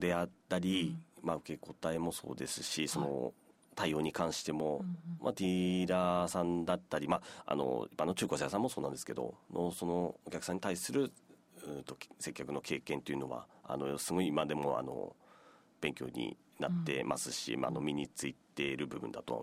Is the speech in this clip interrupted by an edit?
no; 0 cuts

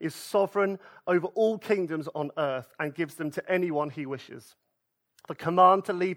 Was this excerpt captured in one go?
yes; 0 cuts

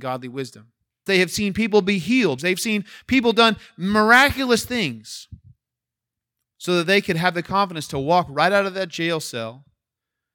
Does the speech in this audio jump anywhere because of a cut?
yes; 3 cuts; at 1.1 s, 2.4 s, 6.4 s

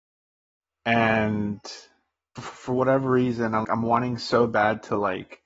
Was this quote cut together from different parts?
yes; 2 cuts; at 2.4 s, 3.6 s

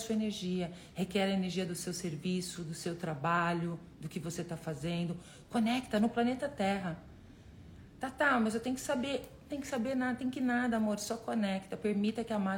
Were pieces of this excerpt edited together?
no; 0 cuts

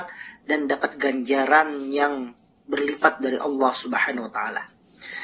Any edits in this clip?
no; 0 cuts

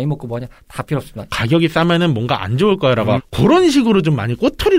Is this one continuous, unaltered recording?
no; 2 cuts; at 1.3 s, 3.2 s

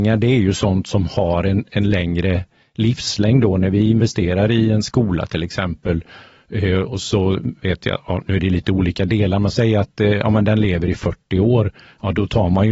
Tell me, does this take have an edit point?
no; 0 cuts

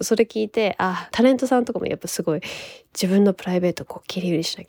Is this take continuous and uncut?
no; 1 cut; at 1.1 s

